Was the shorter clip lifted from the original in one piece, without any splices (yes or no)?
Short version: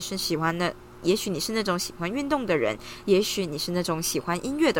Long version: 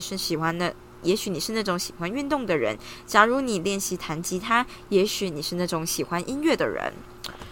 no